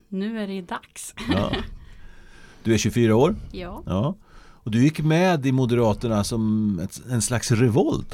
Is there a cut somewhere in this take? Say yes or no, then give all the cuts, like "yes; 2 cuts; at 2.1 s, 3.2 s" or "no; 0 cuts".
no; 0 cuts